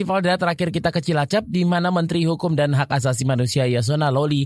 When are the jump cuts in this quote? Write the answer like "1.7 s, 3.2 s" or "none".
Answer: none